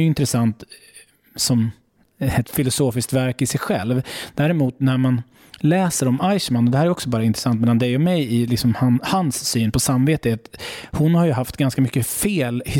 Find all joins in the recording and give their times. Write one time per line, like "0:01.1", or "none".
0:02.4